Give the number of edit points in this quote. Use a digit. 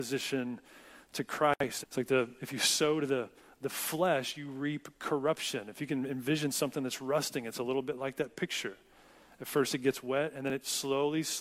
1